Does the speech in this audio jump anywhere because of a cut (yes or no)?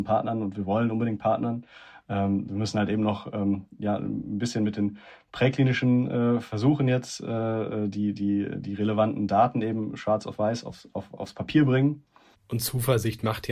yes